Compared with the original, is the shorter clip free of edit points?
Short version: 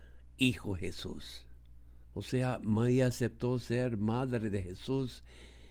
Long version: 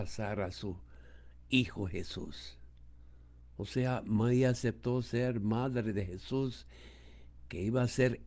no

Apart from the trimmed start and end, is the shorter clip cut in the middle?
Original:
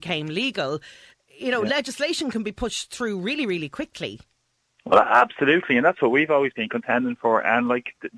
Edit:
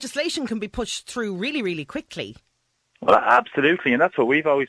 no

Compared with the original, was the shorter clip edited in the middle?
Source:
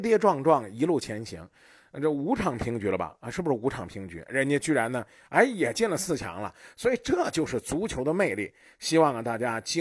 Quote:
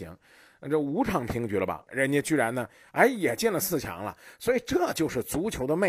yes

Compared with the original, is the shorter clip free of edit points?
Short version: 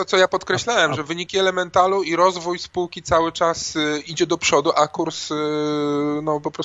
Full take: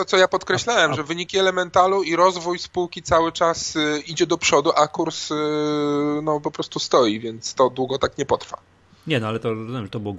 yes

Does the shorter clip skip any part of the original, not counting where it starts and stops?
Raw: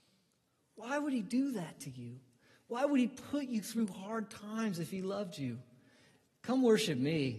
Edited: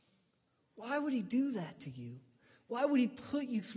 no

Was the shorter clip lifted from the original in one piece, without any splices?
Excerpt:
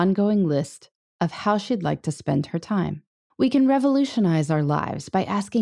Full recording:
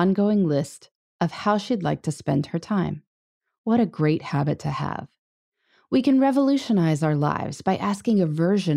no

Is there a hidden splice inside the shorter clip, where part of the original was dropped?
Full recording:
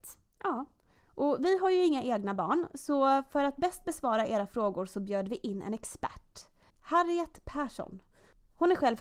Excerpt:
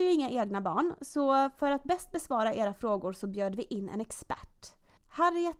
no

